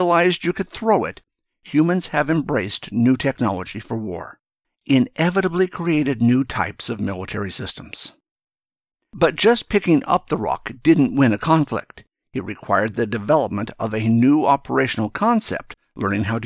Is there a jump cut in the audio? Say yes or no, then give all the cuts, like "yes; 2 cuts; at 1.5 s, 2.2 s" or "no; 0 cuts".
yes; 1 cut; at 4.6 s